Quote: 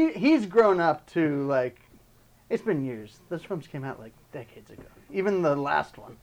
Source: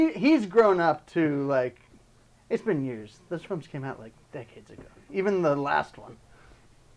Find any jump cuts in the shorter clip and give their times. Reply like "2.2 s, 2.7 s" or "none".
none